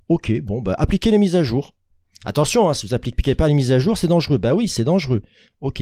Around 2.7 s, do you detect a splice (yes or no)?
no